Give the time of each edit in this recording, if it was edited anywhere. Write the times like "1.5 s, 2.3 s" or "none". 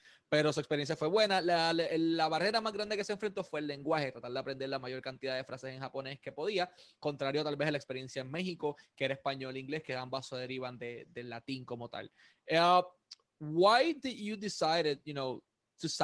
none